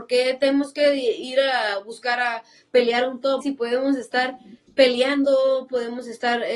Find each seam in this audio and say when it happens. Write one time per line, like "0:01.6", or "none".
0:03.4